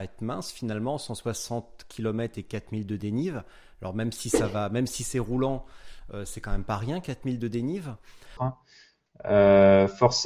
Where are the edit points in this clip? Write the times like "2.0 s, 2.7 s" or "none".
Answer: 8.4 s